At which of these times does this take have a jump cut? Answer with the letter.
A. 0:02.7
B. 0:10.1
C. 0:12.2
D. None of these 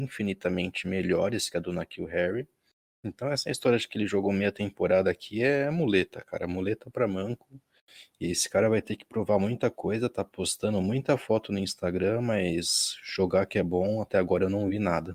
D